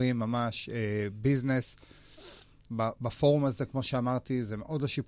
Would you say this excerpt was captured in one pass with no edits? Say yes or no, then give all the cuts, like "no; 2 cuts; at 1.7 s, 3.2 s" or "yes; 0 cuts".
no; 1 cut; at 2.6 s